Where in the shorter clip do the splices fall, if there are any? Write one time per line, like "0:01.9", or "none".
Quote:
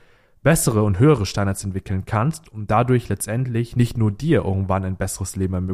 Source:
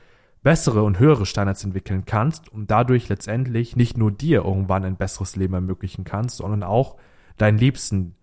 none